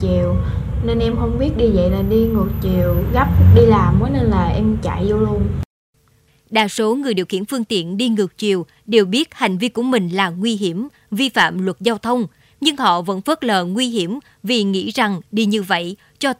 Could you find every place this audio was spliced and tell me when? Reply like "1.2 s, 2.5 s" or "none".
6.3 s

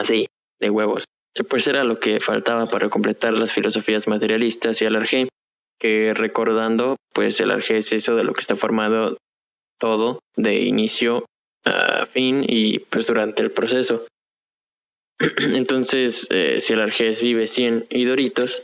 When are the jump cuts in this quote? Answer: none

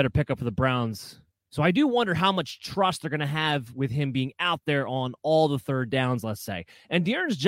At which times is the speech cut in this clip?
1.3 s

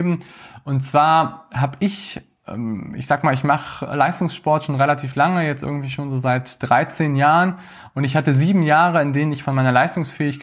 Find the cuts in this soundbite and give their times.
none

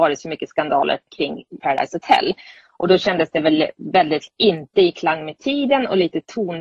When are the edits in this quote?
1.6 s

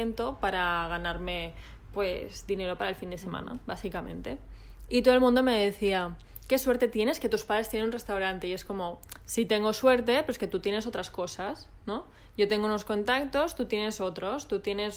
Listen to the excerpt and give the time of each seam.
none

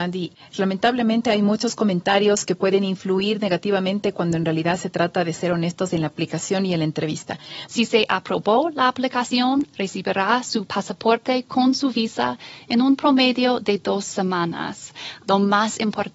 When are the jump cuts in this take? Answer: 7.7 s, 15.2 s

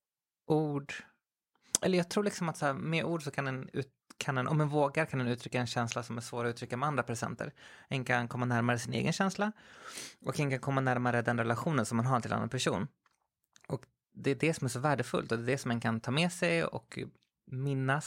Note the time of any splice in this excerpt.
none

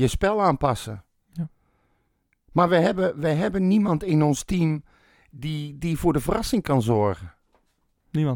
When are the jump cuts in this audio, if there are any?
none

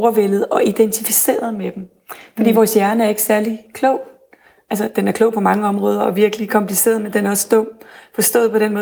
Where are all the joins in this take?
none

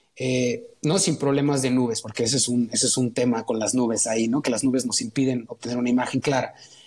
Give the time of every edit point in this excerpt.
none

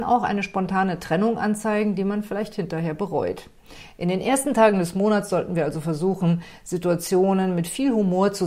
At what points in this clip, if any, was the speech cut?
none

